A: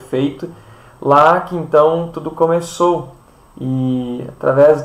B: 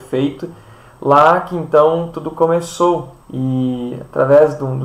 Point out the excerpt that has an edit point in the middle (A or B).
B